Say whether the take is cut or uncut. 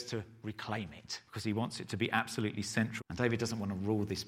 cut